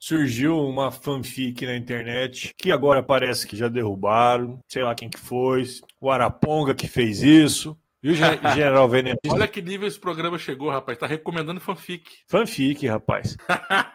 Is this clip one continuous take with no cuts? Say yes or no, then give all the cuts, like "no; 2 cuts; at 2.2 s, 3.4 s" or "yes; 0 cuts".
no; 2 cuts; at 3.5 s, 9.2 s